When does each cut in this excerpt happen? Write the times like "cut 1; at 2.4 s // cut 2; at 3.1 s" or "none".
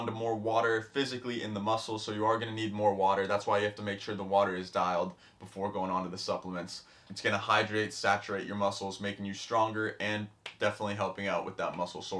cut 1; at 7.1 s